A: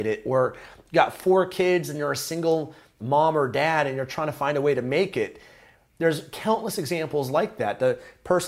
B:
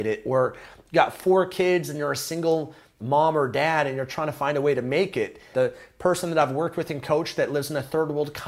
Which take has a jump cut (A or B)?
B